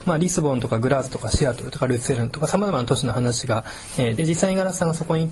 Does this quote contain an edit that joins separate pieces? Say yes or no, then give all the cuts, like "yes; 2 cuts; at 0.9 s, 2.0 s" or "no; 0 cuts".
yes; 1 cut; at 4.2 s